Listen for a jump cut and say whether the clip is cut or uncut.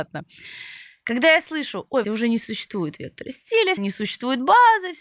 cut